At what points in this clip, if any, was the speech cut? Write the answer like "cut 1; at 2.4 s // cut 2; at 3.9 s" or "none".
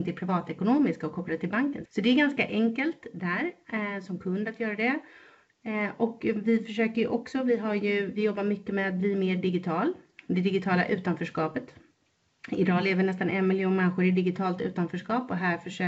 cut 1; at 1.9 s